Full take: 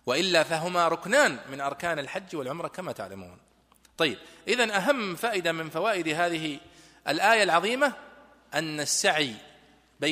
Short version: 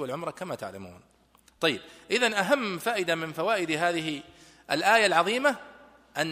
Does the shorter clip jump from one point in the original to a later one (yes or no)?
no